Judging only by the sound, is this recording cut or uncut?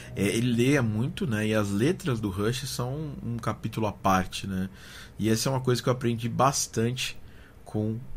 cut